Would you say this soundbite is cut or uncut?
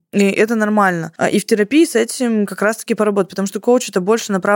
uncut